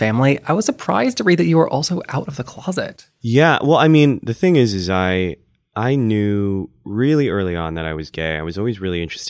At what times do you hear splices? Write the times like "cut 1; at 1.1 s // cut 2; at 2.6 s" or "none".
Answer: none

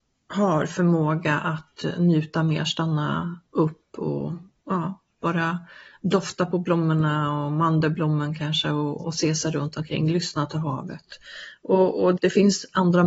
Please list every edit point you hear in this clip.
cut 1; at 9.0 s // cut 2; at 12.2 s

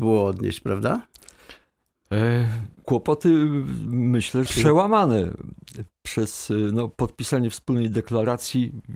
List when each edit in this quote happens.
cut 1; at 2.8 s // cut 2; at 4.5 s

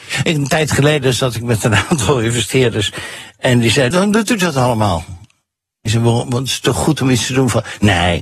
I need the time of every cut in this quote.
cut 1; at 3.9 s

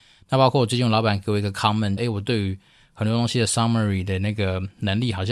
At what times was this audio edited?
cut 1; at 2.0 s

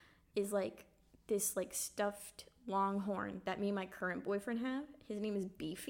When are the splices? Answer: none

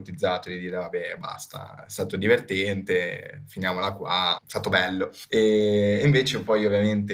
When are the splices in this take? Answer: none

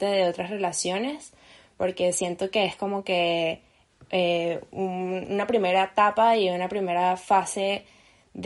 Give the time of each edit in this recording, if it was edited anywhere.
none

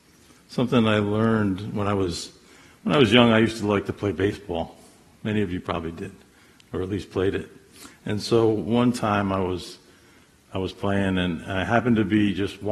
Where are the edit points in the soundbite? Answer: none

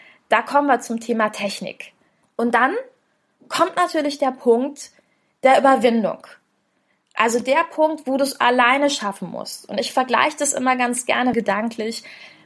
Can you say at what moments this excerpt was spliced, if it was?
cut 1; at 2.2 s // cut 2; at 11.3 s

